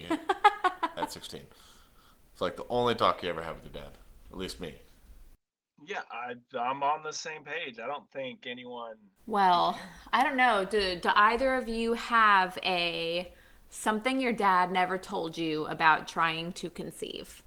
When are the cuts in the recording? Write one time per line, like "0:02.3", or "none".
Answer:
0:09.2